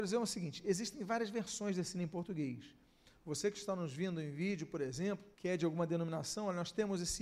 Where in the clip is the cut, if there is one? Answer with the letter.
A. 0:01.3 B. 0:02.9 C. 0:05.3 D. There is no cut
C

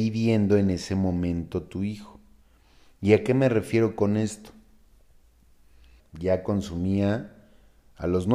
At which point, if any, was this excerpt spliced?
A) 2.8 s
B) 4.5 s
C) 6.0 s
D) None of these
C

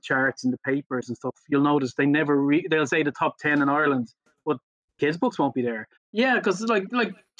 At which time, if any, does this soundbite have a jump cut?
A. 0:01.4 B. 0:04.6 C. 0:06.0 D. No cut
C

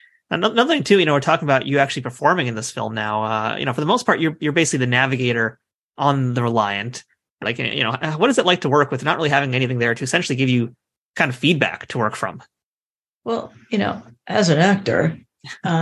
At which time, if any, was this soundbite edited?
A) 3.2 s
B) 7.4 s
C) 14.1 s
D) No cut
B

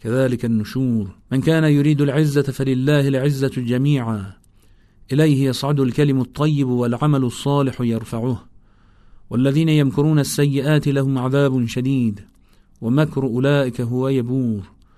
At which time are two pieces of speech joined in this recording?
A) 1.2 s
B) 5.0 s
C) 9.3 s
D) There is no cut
A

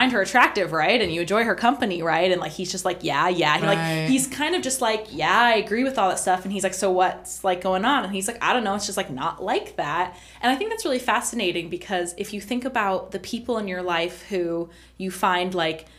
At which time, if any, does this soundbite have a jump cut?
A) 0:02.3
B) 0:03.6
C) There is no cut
B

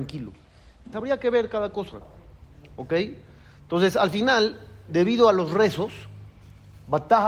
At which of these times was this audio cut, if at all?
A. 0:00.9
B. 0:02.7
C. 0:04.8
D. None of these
A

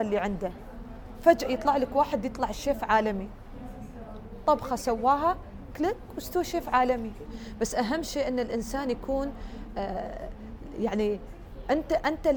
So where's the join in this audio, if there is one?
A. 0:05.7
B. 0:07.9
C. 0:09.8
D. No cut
A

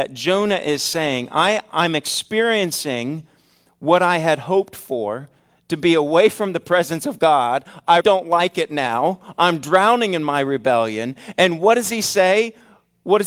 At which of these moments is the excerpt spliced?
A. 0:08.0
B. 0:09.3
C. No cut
A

